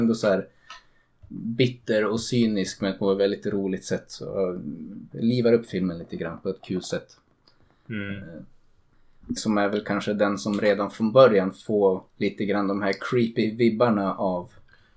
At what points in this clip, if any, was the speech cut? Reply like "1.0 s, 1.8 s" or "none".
5.1 s, 9.4 s, 12.1 s